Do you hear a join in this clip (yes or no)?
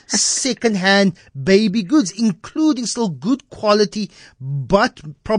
no